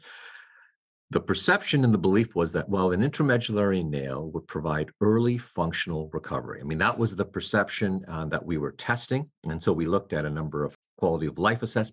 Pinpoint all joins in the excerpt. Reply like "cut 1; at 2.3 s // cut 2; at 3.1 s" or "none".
none